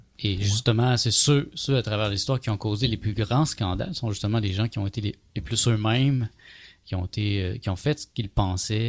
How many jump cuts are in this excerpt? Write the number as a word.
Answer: zero